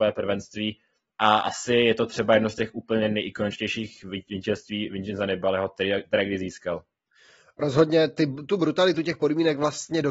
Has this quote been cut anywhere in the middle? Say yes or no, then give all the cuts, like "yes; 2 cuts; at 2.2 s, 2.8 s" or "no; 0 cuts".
no; 0 cuts